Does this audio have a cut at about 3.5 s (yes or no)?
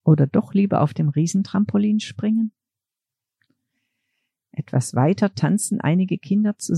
no